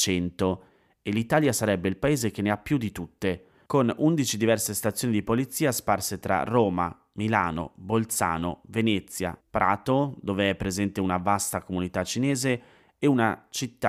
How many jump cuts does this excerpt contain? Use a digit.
1